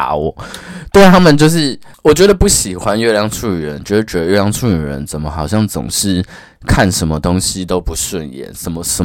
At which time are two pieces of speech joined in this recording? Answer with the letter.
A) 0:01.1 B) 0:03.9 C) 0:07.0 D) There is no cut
D